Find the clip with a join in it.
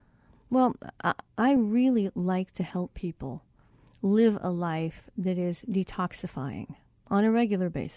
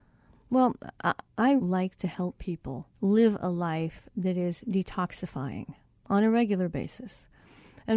second; 2 cuts; at 1.6 s, 2.9 s

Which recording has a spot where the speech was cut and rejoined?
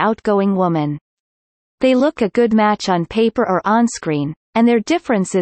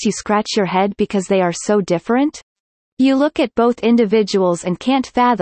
first; 1 cut; at 2.2 s

